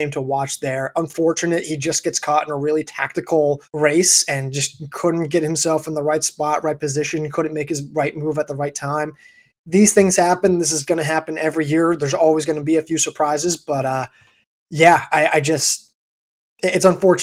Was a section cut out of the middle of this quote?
yes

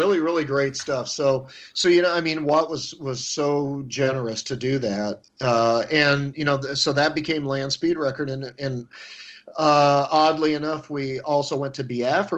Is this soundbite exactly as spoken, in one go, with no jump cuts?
yes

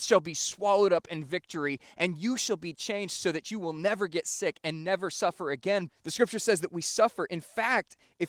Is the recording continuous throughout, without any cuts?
no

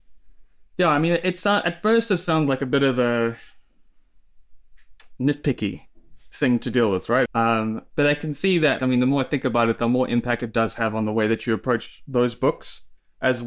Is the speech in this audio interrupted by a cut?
yes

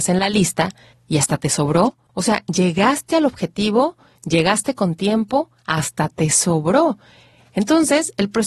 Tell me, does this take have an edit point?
yes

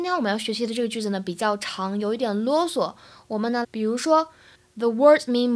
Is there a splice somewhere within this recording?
yes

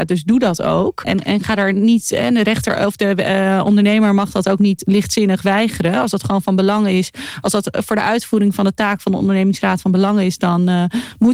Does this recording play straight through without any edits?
no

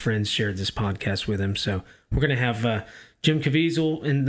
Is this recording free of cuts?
yes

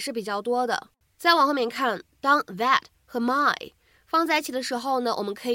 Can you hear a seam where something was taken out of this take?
yes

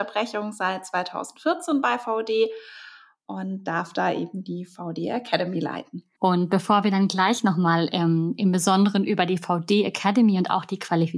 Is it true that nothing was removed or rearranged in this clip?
no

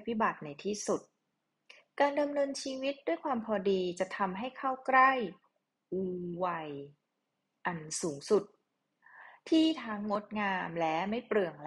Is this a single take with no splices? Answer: yes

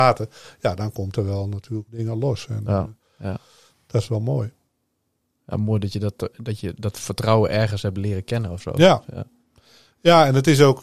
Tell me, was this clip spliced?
yes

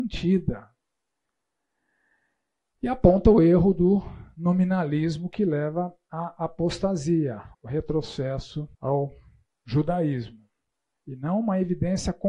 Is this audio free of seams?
no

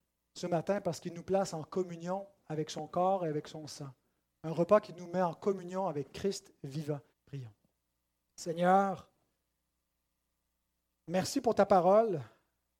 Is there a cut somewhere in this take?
yes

